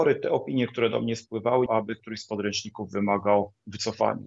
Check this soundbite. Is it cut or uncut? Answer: cut